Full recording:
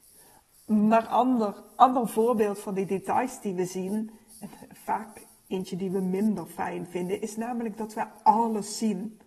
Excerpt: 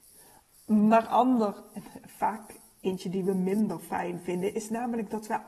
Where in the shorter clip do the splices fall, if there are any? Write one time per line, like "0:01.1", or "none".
0:01.7